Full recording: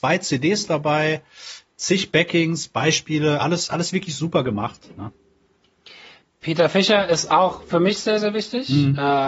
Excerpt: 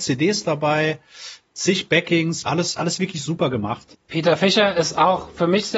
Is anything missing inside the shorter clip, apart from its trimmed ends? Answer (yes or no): yes